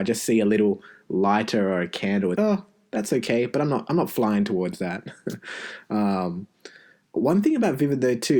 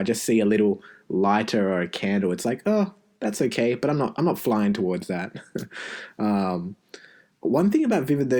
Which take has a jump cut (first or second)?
first